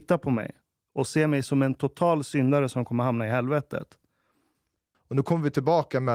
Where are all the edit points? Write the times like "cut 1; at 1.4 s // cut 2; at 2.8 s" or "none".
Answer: cut 1; at 4.9 s